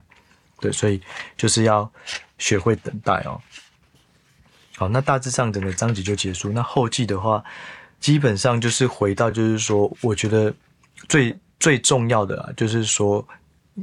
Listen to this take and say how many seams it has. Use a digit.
0